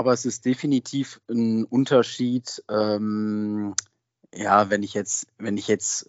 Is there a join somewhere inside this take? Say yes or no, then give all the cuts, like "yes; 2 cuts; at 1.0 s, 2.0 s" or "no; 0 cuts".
no; 0 cuts